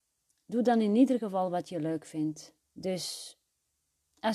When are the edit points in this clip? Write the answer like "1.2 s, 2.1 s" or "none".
2.6 s